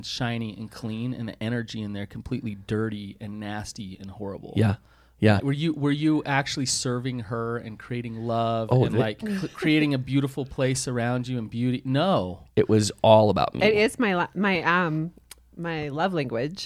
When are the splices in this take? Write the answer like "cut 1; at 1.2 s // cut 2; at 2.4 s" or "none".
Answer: cut 1; at 5.4 s // cut 2; at 9.2 s